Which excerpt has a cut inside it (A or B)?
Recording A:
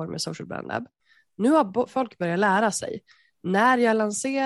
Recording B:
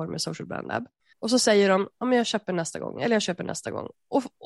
B